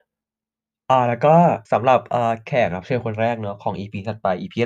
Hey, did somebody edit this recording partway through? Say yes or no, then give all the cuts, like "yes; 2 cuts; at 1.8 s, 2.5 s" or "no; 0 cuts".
yes; 1 cut; at 1.6 s